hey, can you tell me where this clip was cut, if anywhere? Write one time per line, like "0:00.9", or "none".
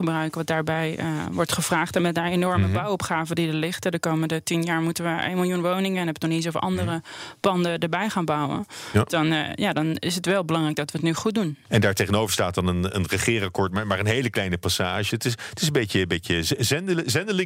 0:11.7
0:15.1